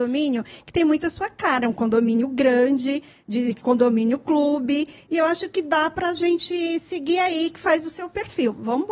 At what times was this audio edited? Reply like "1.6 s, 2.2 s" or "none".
none